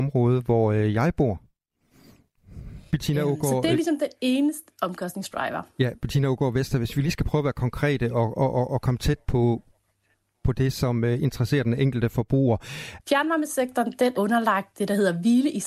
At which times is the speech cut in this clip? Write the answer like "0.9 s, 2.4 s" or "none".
2.9 s, 13.0 s, 14.1 s